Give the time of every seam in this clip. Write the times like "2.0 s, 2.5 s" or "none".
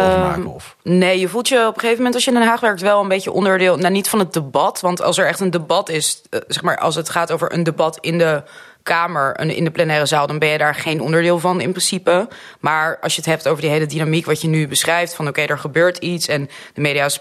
none